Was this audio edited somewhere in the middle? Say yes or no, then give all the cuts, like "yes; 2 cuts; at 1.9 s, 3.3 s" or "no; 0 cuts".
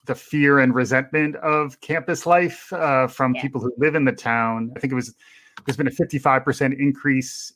yes; 1 cut; at 4.8 s